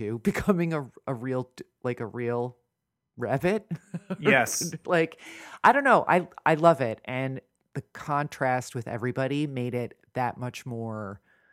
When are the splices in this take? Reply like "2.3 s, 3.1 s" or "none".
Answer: none